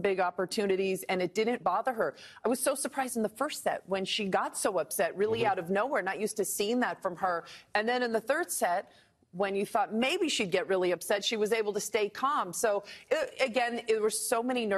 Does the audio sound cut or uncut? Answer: cut